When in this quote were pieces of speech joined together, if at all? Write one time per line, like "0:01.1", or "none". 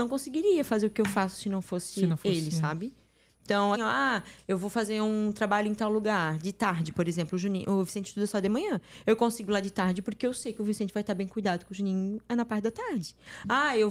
0:03.7